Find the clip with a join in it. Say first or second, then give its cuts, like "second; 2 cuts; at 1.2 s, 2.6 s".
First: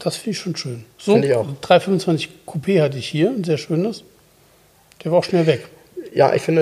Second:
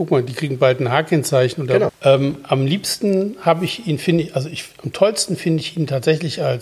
second; 1 cut; at 1.9 s